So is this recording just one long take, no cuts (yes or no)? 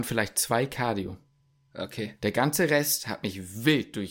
yes